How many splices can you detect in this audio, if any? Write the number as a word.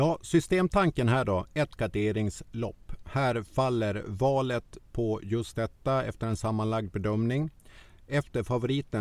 zero